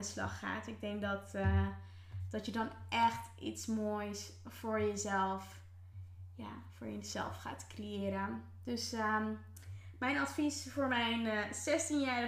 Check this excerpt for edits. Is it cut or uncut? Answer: uncut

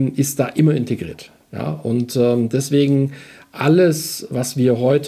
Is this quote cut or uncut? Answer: uncut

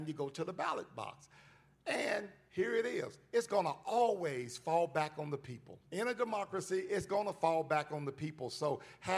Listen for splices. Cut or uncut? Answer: cut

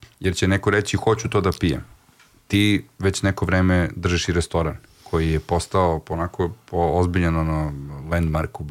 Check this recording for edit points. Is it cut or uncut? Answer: uncut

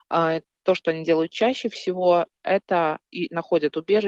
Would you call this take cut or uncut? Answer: uncut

